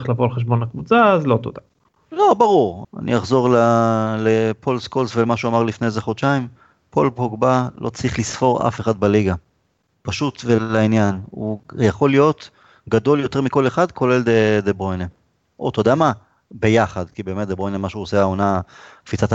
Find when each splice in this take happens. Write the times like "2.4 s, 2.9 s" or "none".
2.8 s